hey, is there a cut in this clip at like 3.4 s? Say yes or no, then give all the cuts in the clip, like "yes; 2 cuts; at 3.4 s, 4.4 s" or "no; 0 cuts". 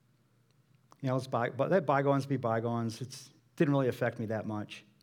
yes; 1 cut; at 3.4 s